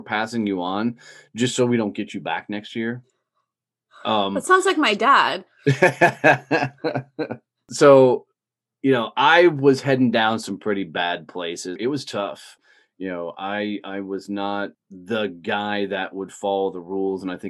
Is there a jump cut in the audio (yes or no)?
yes